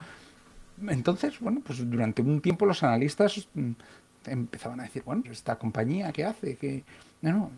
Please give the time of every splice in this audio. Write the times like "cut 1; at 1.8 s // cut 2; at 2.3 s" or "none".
cut 1; at 5.2 s